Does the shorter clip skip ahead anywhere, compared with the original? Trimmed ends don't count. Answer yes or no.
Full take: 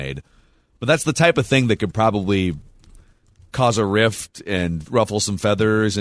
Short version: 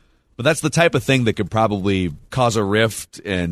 yes